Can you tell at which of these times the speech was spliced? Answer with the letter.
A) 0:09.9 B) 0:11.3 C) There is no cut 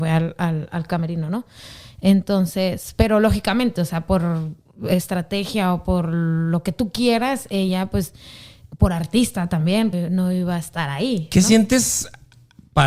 A